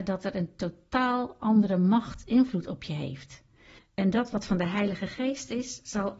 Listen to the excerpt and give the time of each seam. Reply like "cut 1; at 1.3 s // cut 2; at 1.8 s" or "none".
cut 1; at 3.8 s